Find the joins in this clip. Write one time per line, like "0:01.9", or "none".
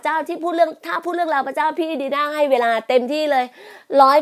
none